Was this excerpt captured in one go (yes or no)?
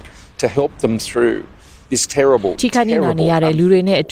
yes